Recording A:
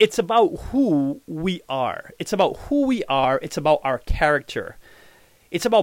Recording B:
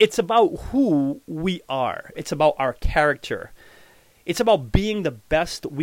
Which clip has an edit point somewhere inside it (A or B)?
B